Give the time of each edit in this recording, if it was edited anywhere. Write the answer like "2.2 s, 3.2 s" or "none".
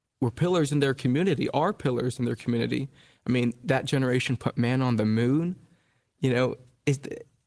none